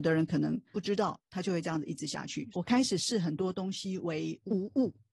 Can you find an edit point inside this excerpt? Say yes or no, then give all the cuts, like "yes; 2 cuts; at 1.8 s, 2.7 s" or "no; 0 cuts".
yes; 1 cut; at 2.5 s